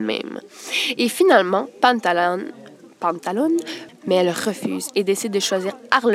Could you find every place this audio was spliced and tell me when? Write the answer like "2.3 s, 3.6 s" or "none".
3.9 s